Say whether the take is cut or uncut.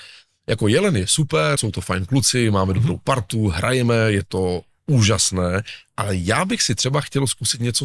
cut